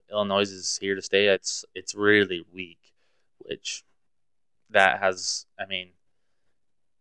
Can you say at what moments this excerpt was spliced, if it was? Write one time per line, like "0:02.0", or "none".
0:01.3
0:02.5